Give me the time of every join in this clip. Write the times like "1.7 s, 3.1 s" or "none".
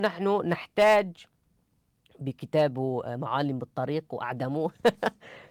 none